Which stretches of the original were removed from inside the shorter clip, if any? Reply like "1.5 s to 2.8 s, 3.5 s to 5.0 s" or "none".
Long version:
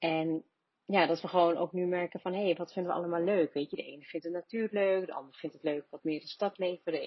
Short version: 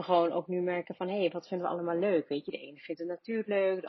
none